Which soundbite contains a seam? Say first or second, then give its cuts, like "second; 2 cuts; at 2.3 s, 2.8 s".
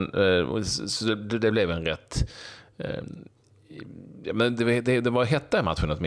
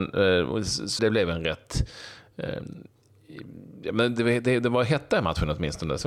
second; 1 cut; at 1.0 s